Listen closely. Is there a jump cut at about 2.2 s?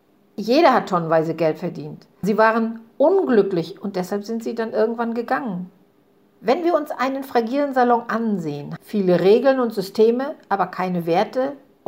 yes; 2 cuts; at 2.2 s, 8.8 s

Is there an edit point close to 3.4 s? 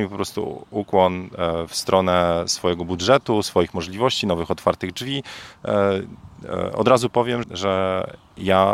no; 1 cut; at 7.4 s

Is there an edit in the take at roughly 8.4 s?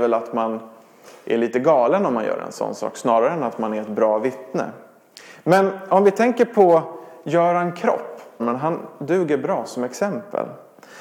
yes; 1 cut; at 8.4 s

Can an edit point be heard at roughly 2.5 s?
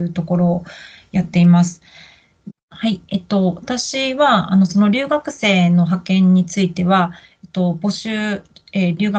yes; 1 cut; at 2.5 s

